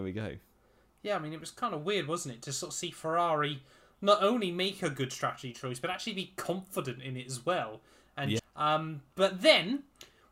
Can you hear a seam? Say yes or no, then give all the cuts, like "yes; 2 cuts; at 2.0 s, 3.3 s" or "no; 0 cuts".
yes; 1 cut; at 8.4 s